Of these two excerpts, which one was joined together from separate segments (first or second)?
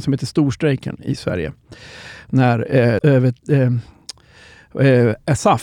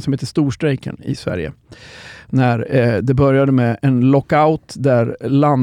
first